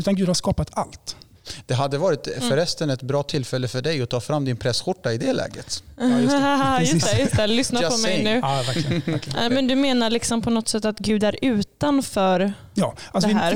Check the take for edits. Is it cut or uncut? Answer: cut